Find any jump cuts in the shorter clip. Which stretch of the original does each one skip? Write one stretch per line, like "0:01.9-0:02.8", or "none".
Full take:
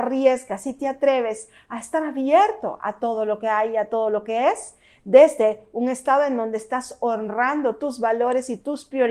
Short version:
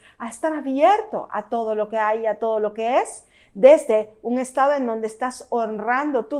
none